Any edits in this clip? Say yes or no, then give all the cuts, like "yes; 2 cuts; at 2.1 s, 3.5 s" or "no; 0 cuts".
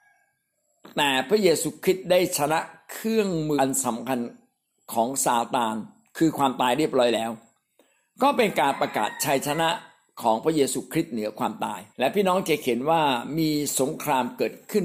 yes; 2 cuts; at 3.6 s, 11.9 s